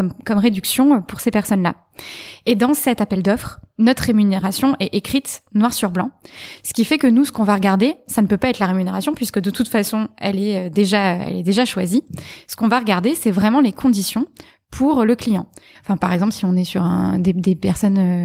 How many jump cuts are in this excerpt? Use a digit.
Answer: 1